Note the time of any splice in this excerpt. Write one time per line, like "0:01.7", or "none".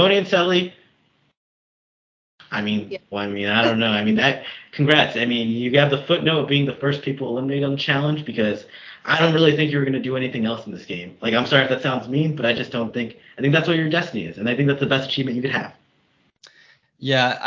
0:03.1